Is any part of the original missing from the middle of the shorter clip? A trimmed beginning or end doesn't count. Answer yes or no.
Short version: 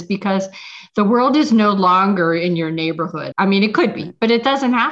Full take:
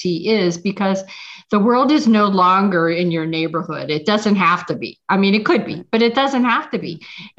yes